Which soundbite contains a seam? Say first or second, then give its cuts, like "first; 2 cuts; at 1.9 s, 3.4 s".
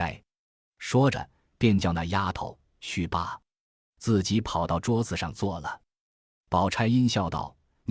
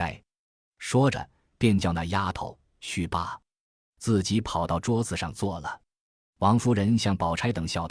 first; 1 cut; at 6.1 s